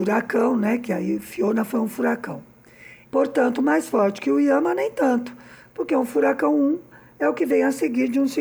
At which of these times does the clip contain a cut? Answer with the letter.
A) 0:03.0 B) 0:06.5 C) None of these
A